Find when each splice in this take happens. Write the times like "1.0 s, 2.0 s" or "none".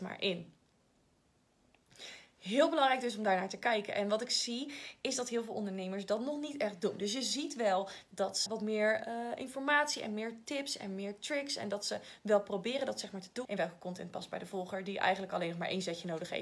8.5 s, 13.4 s